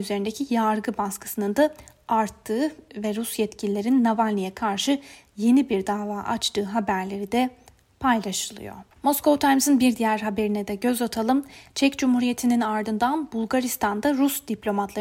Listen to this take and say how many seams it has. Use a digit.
1